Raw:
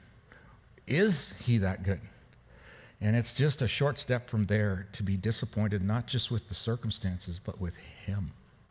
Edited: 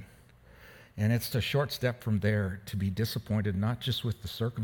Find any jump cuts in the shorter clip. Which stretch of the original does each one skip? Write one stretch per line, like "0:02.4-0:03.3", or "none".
0:03.3-0:03.6